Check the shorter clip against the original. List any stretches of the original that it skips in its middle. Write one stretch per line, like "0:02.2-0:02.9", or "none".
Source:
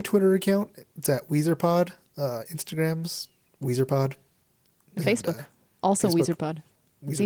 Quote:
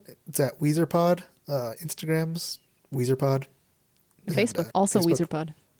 0:05.4-0:05.8